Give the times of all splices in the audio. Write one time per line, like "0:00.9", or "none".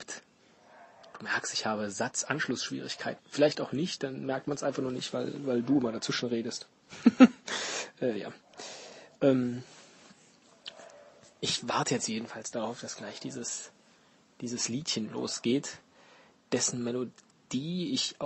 0:03.2